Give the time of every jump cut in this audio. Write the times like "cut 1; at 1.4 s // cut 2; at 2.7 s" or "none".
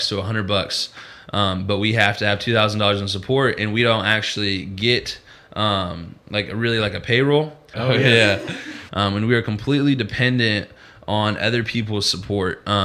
cut 1; at 7.7 s // cut 2; at 8.9 s